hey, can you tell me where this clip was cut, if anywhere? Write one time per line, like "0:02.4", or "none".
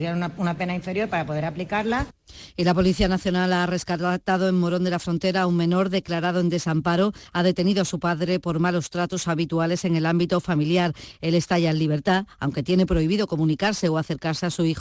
none